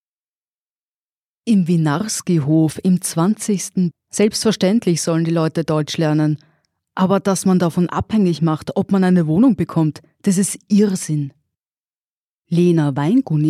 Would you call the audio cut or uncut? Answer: cut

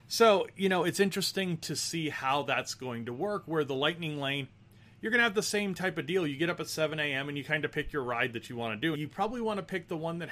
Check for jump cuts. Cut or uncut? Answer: cut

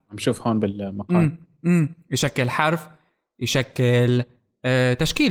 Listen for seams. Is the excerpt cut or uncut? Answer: uncut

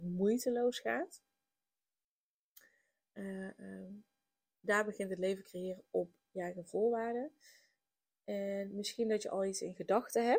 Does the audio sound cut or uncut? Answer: uncut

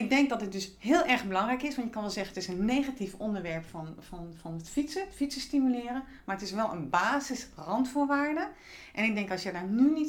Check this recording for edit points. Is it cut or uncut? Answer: uncut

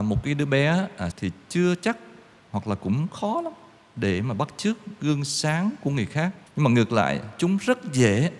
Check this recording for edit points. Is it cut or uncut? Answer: cut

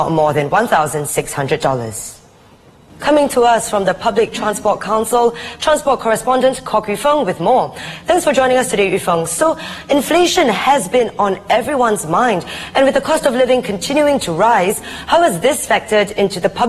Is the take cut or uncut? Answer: uncut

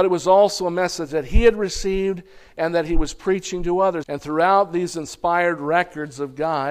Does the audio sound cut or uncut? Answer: cut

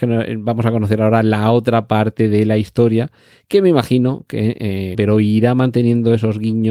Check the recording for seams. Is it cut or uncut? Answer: cut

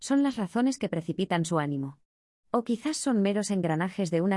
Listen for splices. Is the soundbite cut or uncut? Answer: uncut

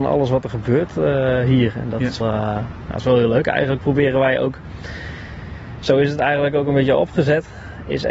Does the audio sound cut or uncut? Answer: cut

